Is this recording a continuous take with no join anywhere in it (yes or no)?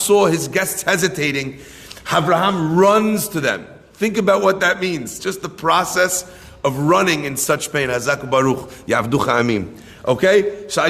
yes